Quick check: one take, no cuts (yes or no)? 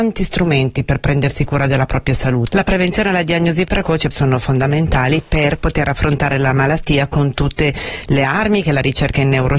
no